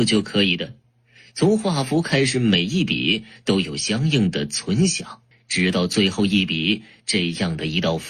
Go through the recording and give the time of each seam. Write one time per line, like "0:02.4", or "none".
0:05.3